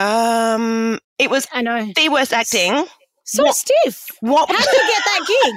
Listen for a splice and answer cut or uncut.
uncut